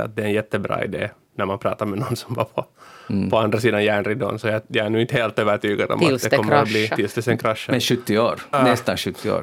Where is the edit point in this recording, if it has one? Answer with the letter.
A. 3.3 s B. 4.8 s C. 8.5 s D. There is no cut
C